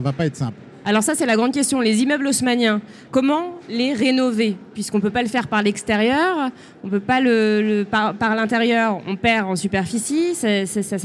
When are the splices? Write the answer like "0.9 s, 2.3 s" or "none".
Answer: 3.1 s